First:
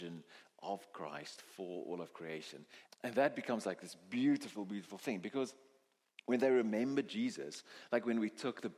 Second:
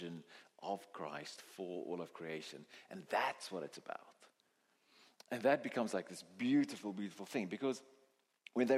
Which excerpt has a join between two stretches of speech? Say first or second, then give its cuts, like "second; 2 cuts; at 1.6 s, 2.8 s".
first; 1 cut; at 2.9 s